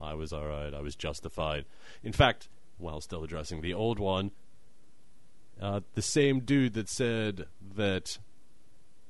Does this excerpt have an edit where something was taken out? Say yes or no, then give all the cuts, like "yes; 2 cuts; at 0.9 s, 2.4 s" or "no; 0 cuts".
yes; 1 cut; at 2.8 s